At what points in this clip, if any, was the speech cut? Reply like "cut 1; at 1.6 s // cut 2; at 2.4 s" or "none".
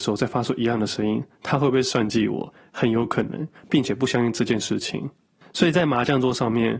cut 1; at 3.6 s